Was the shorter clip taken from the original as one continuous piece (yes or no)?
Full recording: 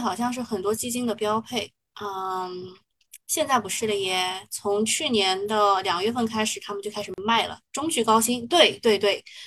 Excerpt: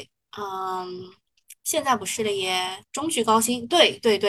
no